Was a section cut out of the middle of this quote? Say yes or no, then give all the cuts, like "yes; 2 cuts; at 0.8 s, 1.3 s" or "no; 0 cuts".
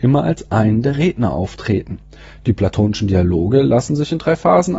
no; 0 cuts